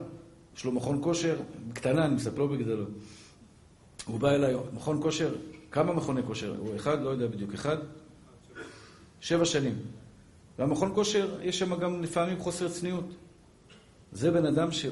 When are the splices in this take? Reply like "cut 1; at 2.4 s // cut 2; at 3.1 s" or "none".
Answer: cut 1; at 2.4 s